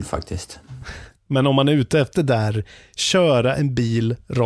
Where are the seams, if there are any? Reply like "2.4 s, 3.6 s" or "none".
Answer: 2.1 s